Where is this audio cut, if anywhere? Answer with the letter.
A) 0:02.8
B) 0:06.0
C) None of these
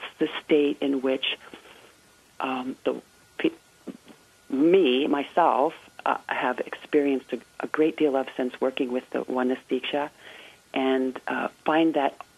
C